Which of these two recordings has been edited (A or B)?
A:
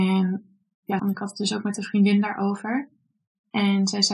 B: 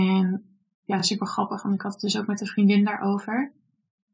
A